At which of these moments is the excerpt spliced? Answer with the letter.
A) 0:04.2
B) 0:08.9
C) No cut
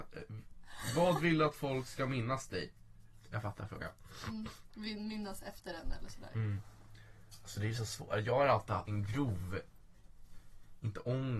B